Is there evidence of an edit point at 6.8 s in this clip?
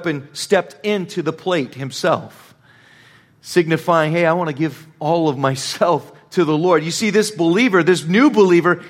no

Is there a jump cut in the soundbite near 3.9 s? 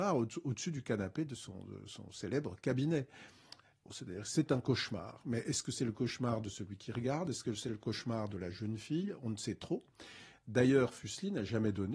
yes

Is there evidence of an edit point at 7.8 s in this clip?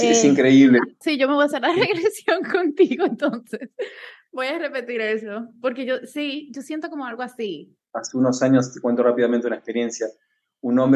yes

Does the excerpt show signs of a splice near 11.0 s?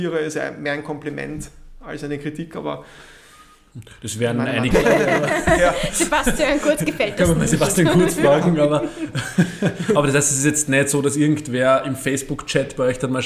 no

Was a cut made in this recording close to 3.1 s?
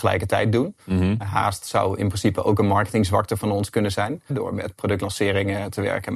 no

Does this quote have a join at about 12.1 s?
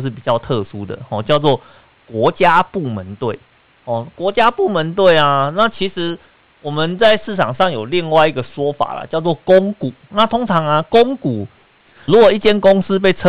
yes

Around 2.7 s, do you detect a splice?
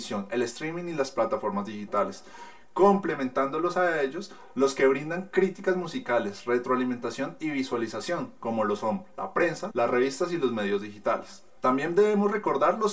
no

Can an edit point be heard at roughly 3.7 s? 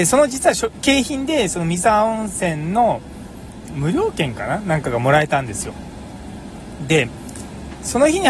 yes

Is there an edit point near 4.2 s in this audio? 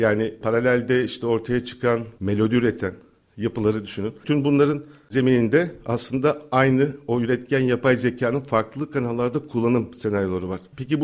no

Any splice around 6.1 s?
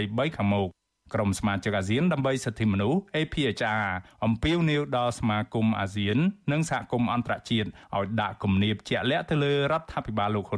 no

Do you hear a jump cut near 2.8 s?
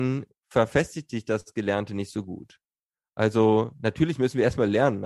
no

